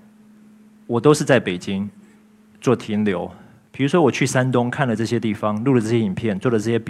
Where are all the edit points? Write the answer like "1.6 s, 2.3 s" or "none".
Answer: none